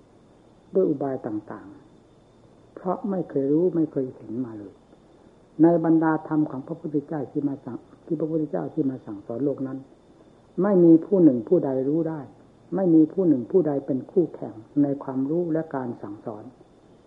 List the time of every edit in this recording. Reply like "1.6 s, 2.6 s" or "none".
none